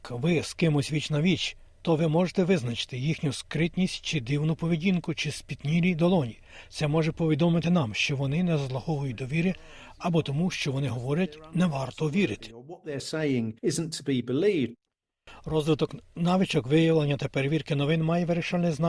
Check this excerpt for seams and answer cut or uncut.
uncut